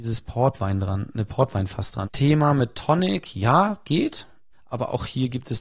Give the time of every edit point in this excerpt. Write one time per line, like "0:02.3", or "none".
0:02.0
0:04.5